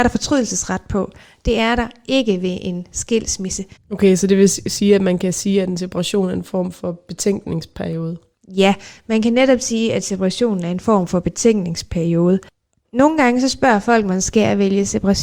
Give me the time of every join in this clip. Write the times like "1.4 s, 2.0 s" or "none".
3.8 s